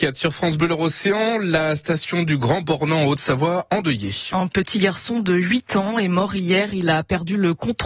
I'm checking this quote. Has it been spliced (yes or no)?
no